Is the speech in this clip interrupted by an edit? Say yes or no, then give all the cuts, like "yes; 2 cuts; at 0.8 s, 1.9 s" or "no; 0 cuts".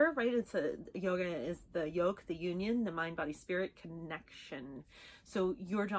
no; 0 cuts